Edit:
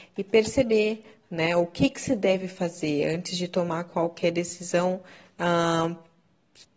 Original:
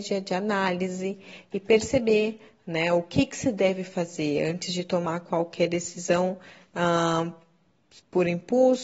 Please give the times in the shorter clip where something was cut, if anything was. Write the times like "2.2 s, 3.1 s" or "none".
none